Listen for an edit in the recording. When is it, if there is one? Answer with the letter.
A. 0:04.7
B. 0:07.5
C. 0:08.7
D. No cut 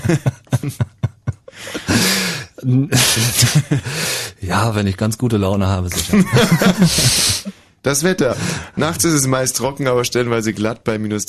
D